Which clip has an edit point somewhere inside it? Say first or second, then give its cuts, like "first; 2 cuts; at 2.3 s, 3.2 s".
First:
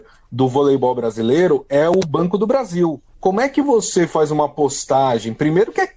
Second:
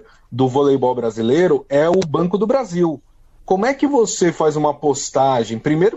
first; 1 cut; at 3.1 s